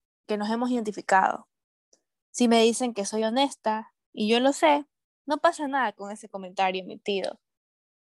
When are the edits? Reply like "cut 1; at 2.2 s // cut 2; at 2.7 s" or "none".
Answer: cut 1; at 5.1 s